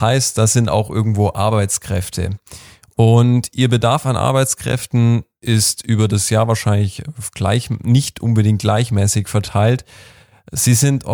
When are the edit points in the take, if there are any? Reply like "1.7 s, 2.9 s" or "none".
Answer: none